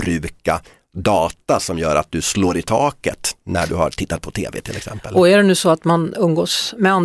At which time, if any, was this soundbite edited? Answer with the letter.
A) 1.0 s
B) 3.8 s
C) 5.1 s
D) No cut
D